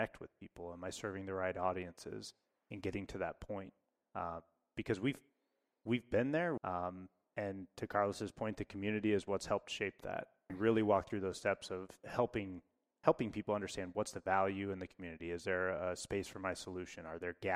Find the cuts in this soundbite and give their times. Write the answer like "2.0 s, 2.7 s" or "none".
6.6 s, 10.5 s